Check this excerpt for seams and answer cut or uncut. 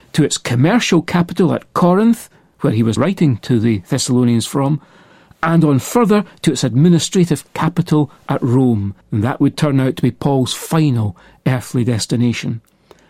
cut